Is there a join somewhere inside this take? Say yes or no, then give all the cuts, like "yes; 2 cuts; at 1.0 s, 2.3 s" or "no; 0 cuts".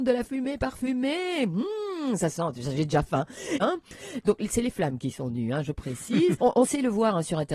yes; 2 cuts; at 3.6 s, 6.4 s